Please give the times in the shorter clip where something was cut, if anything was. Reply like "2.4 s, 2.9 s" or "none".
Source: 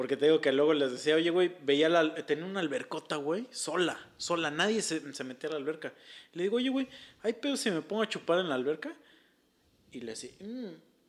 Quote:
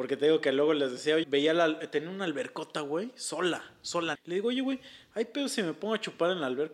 1.2 s, 4.1 s